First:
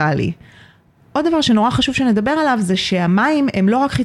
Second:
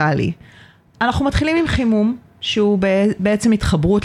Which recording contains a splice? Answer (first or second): second